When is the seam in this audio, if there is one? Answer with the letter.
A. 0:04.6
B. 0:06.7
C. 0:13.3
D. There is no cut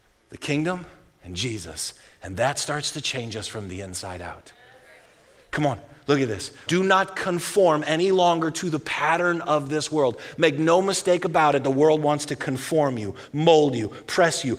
B